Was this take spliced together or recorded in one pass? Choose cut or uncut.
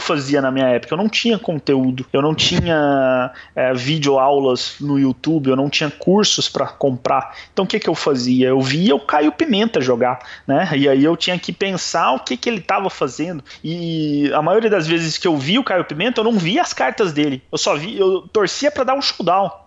uncut